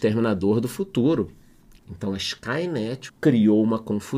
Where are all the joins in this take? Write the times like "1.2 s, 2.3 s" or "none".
1.8 s, 3.1 s